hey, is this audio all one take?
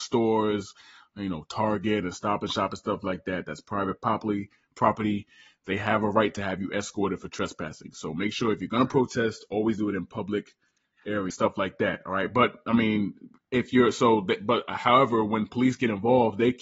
no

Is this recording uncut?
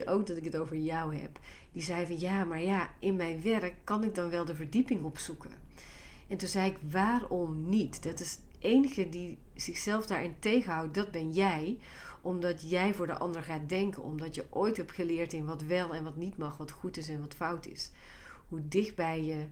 yes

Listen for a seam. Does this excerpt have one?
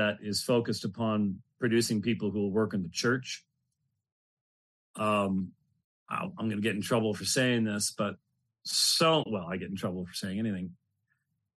no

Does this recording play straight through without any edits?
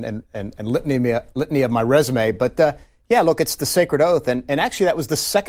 yes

